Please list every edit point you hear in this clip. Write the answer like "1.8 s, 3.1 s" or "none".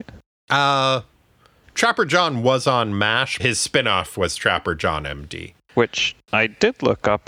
3.4 s, 5.6 s